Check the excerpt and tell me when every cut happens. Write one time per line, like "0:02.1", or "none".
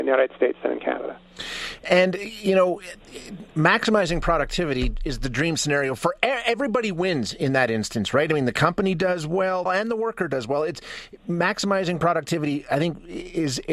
0:09.7